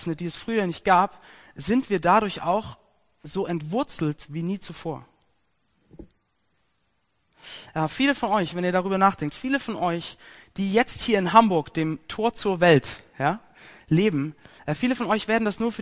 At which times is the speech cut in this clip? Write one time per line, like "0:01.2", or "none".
none